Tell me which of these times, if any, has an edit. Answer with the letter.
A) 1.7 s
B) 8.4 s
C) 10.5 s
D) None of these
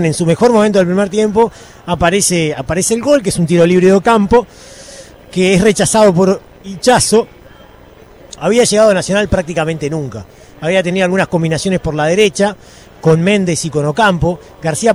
B